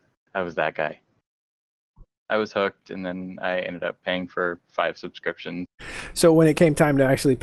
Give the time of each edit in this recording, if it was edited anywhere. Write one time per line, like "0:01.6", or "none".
0:02.1
0:05.7